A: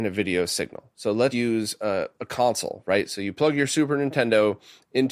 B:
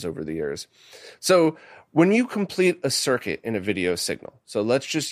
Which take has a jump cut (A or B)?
A